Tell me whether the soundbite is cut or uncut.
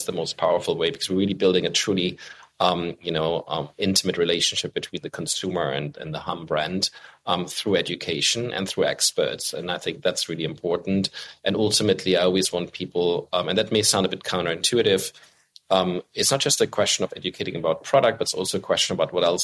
uncut